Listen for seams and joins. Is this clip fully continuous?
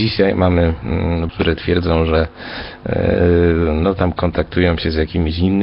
no; 1 cut; at 1.3 s

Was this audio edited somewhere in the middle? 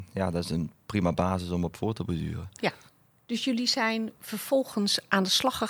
no; 0 cuts

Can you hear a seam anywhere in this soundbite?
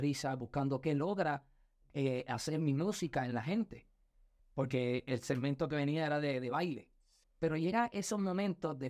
yes; 2 cuts; at 4.4 s, 7.2 s

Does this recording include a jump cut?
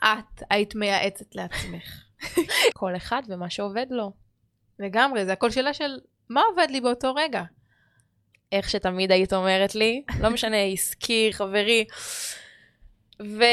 yes; 3 cuts; at 2.7 s, 10.1 s, 11.3 s

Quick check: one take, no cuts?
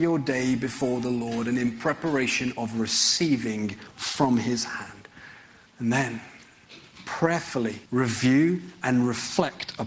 no; 2 cuts; at 5.7 s, 7.9 s

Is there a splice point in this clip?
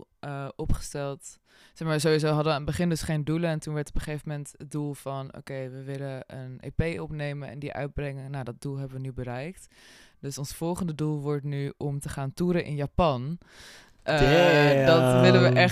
no; 0 cuts

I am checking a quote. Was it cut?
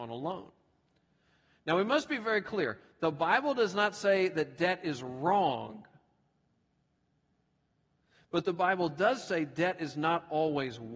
no; 0 cuts

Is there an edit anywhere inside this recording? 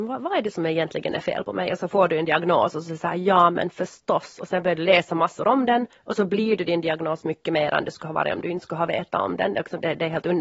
no; 0 cuts

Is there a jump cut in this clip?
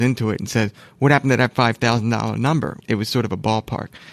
yes; 1 cut; at 2.8 s

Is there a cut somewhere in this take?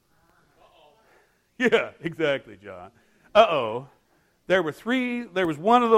no; 0 cuts

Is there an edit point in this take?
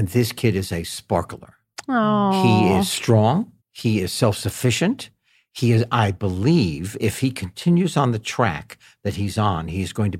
yes; 1 cut; at 3.6 s

